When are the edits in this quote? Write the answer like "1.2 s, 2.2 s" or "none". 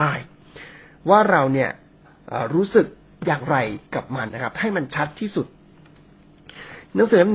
4.3 s

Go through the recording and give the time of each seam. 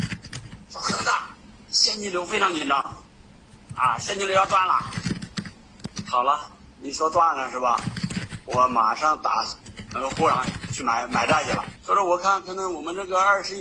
9.9 s

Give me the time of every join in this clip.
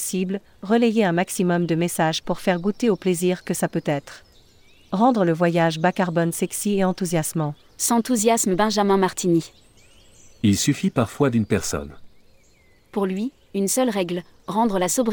4.3 s, 7.7 s

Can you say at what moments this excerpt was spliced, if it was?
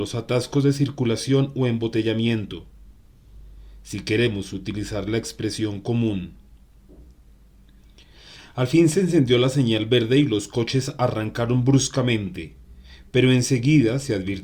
none

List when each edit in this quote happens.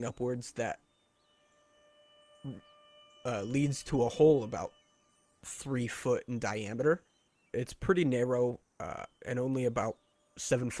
7.5 s

